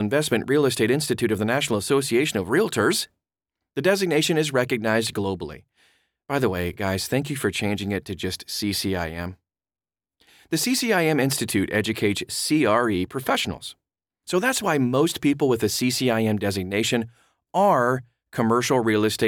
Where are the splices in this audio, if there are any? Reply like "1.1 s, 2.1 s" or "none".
none